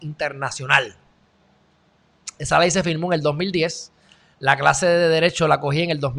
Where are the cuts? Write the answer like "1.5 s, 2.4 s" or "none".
none